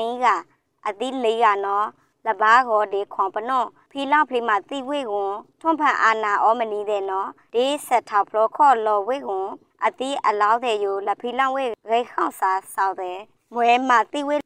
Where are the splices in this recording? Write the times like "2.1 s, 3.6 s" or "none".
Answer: none